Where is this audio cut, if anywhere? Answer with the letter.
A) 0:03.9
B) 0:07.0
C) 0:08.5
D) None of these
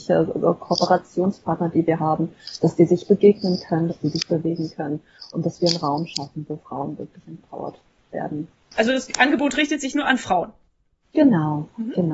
A